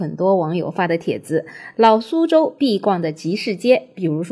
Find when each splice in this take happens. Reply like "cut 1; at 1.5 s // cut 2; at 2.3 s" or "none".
none